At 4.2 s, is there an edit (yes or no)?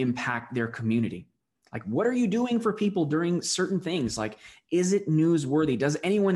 no